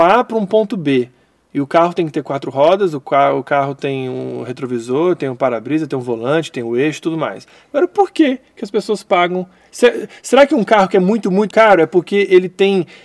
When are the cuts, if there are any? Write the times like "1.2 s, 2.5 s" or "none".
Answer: 11.5 s